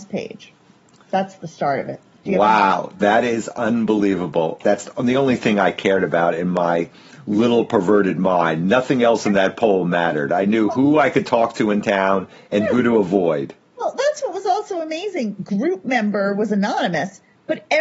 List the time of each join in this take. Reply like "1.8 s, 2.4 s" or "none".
4.6 s